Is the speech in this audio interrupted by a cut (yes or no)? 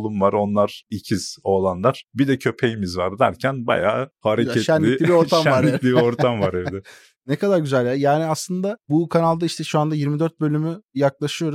no